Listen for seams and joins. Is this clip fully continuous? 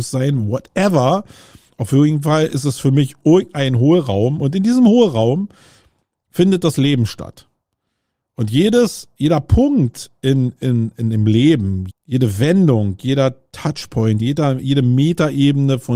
no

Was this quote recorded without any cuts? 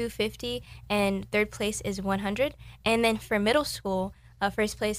yes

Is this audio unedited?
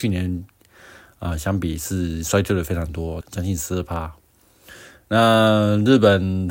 no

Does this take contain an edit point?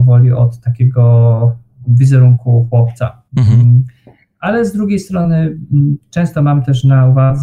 yes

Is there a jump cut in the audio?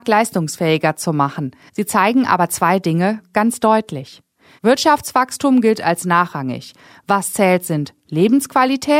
yes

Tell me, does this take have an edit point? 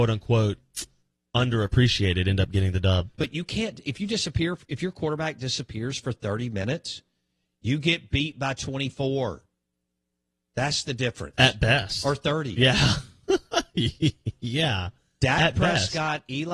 yes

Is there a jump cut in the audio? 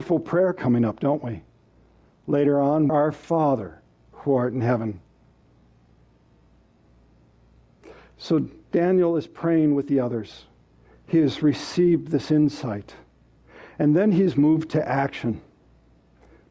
yes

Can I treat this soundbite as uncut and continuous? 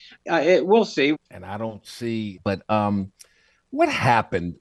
no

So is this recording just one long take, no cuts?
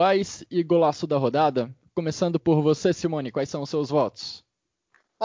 yes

